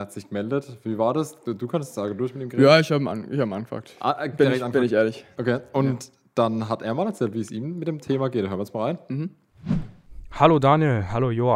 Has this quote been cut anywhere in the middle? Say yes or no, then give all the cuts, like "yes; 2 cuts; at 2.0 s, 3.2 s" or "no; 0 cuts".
no; 0 cuts